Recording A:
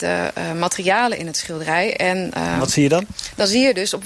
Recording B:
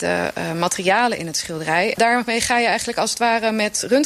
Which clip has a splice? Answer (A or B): B